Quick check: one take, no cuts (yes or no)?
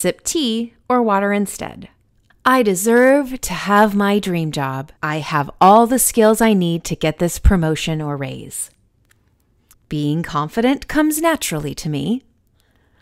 no